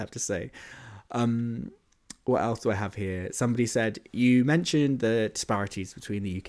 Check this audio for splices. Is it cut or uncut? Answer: uncut